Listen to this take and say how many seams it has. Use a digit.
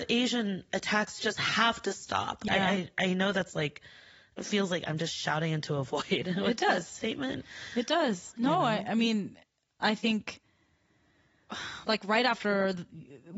1